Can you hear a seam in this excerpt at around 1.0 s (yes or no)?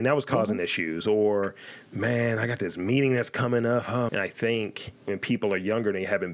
no